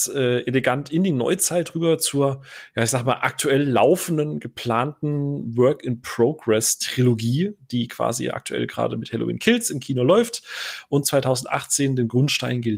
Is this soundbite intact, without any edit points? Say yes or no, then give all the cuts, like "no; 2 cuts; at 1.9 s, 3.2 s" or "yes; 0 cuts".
yes; 0 cuts